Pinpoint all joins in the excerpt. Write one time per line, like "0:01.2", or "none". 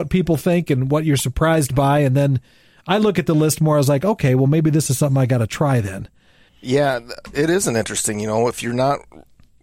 0:06.5